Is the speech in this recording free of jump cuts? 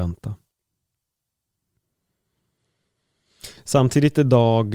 no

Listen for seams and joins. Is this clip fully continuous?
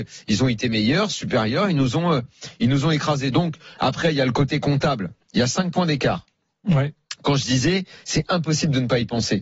yes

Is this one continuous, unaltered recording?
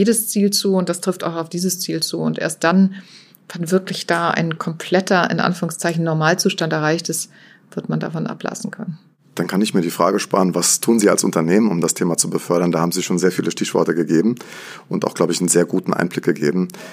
yes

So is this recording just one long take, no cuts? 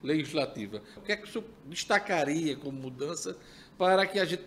no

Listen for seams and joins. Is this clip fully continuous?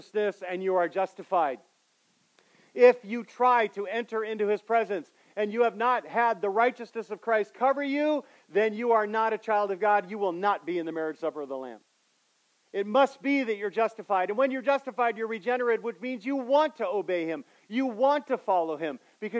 yes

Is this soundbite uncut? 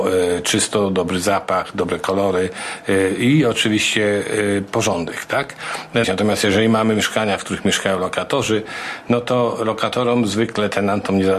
no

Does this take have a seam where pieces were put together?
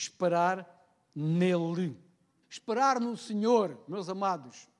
yes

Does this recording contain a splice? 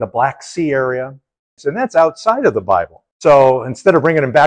yes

